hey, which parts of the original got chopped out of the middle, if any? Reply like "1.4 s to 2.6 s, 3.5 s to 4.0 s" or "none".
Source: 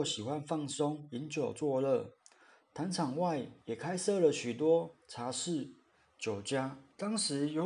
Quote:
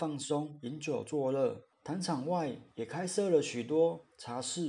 2.2 s to 2.6 s